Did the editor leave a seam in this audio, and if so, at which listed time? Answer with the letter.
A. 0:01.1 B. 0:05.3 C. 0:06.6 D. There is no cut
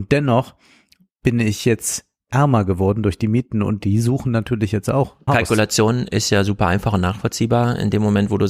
B